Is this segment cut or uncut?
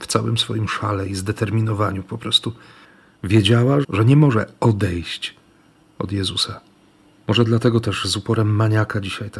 cut